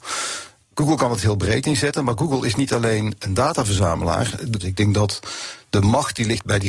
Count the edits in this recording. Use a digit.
1